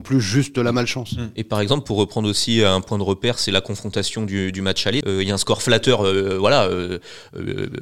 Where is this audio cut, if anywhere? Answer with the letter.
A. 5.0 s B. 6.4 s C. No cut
A